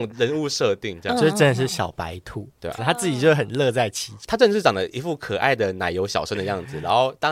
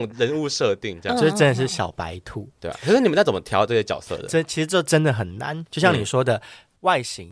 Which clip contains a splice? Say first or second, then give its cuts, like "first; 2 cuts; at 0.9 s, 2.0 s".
first; 1 cut; at 2.8 s